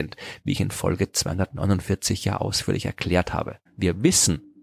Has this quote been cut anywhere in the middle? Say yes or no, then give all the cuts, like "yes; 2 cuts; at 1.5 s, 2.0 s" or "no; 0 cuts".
yes; 1 cut; at 3.7 s